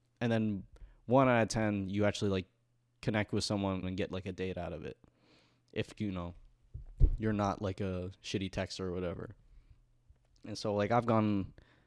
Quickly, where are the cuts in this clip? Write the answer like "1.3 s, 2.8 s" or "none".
3.8 s